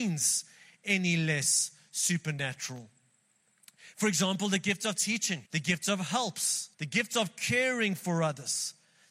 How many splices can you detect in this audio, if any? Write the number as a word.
two